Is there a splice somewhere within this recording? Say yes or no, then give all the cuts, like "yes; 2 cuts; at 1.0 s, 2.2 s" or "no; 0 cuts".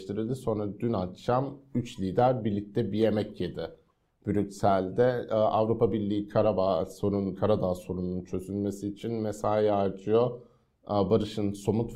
no; 0 cuts